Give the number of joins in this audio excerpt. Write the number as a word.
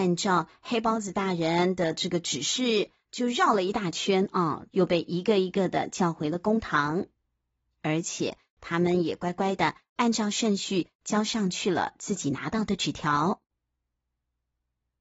two